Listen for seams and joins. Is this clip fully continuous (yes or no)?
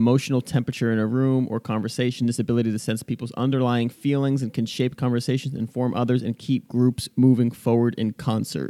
yes